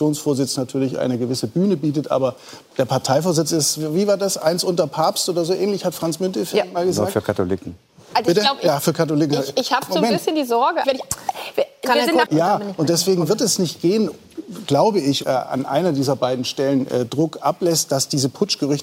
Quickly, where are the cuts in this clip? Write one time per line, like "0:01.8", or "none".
0:10.8
0:12.3
0:15.2